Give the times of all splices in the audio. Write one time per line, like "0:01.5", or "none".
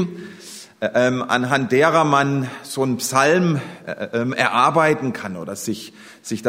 none

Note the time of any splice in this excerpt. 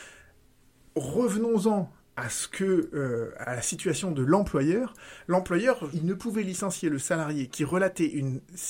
0:03.4
0:05.9

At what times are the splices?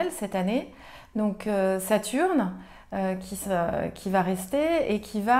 none

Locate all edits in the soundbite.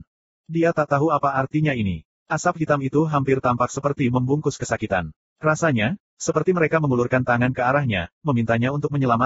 none

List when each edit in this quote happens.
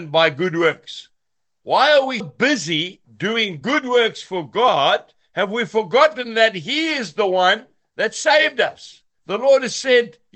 0:02.2
0:09.2

